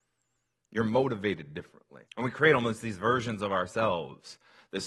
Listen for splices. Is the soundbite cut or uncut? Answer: cut